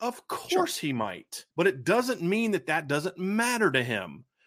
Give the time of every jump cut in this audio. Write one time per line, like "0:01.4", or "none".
0:01.5